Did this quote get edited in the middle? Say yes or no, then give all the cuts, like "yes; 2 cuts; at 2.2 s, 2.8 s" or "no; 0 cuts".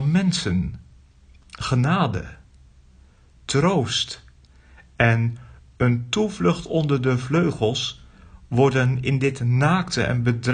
no; 0 cuts